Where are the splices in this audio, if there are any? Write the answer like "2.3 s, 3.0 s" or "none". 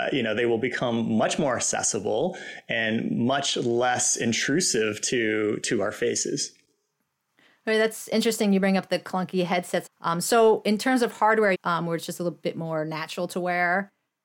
9.9 s, 11.5 s